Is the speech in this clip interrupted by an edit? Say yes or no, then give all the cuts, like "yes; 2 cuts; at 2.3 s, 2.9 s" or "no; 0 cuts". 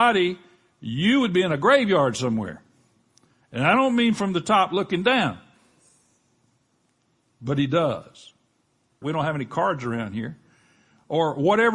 yes; 1 cut; at 9.0 s